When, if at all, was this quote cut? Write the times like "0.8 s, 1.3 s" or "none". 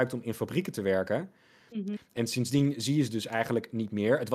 2.0 s